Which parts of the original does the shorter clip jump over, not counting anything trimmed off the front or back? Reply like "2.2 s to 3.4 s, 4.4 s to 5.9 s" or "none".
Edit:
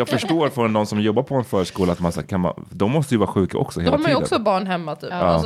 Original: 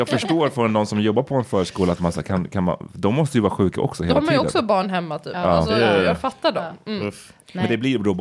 2.2 s to 2.5 s